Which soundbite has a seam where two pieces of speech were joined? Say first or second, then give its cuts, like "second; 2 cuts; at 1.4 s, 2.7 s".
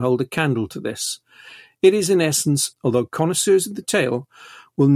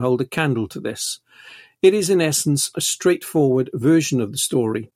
first; 1 cut; at 2.7 s